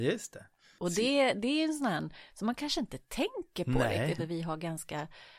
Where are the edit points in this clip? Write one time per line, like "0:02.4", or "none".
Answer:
0:04.2